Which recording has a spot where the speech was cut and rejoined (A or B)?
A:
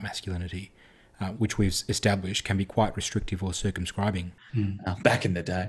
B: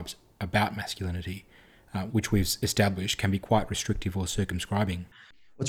A